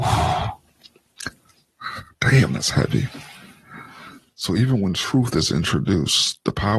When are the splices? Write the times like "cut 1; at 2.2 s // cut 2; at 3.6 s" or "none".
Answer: none